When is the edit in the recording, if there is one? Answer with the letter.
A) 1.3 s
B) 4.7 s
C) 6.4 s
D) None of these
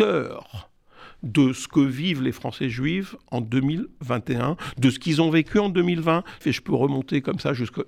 C